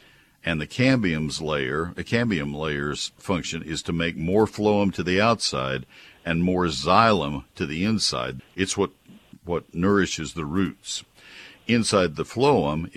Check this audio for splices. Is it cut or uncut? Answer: cut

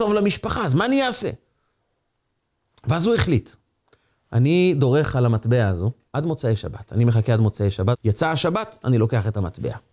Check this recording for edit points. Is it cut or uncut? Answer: cut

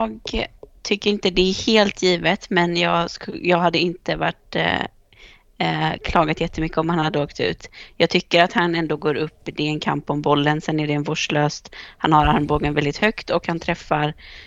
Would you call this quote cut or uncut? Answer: uncut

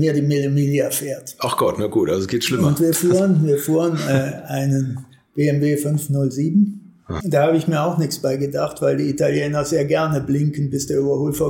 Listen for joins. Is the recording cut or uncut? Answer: cut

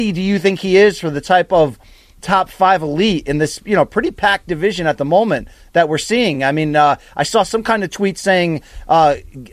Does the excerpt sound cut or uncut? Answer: uncut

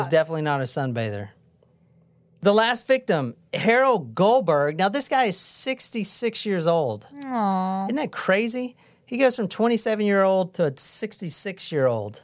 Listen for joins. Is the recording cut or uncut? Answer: uncut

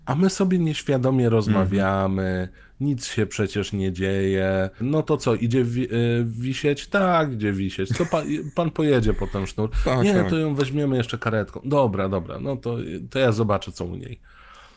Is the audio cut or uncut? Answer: cut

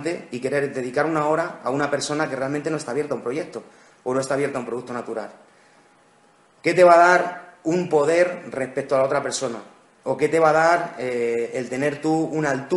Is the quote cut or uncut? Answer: uncut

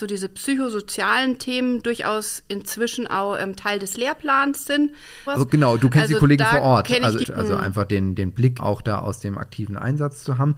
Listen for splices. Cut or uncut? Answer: cut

